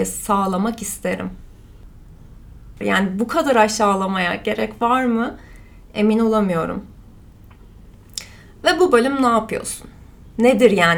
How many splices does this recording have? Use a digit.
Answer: 1